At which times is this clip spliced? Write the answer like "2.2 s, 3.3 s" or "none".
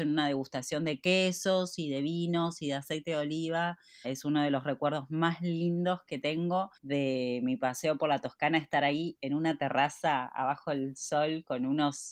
4.0 s, 6.8 s